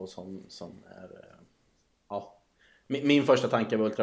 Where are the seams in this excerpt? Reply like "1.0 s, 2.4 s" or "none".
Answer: none